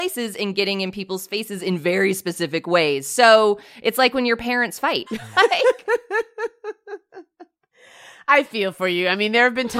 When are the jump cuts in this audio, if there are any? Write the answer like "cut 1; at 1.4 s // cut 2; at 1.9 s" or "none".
cut 1; at 5.1 s